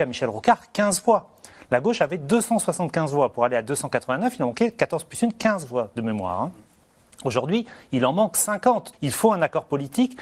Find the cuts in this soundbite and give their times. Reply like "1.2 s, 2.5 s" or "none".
8.9 s